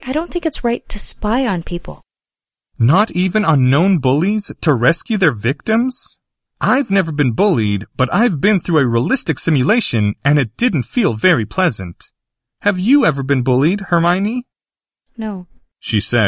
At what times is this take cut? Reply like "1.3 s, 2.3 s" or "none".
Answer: none